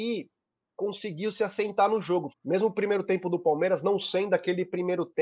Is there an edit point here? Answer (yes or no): yes